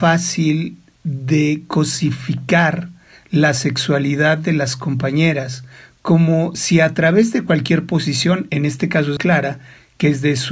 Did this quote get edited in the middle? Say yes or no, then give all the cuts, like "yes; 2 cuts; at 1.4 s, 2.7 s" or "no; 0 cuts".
yes; 1 cut; at 9.2 s